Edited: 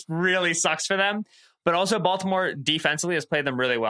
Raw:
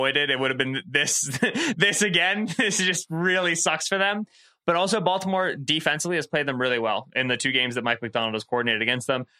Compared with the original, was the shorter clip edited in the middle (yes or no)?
no